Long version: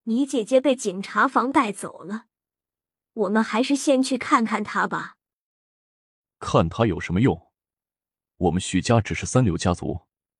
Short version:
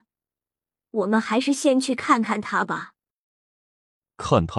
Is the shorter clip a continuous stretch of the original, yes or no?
yes